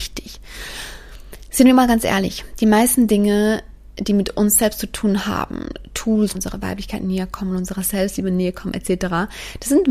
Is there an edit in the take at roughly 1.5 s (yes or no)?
no